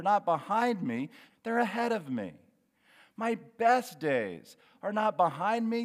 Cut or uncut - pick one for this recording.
cut